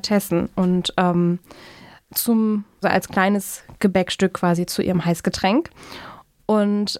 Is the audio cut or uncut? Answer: cut